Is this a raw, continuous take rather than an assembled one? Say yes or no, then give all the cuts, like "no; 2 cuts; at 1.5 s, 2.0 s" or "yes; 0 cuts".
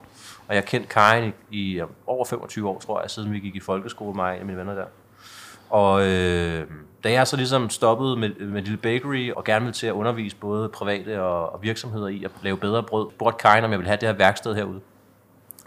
no; 2 cuts; at 9.3 s, 13.1 s